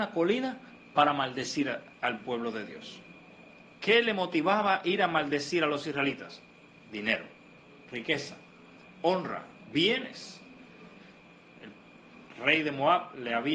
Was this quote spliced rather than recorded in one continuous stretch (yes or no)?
no